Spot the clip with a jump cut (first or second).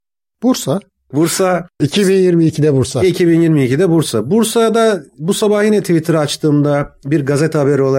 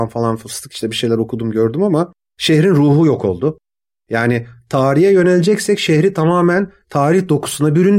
first